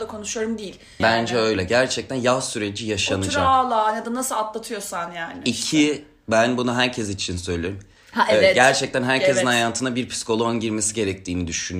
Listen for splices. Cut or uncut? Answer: cut